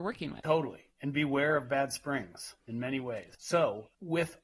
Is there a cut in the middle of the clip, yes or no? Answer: no